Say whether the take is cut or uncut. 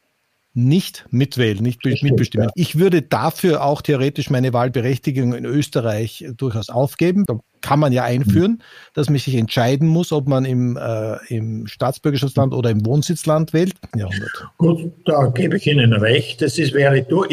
cut